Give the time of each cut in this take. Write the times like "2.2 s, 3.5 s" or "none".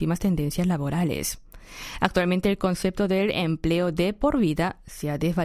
none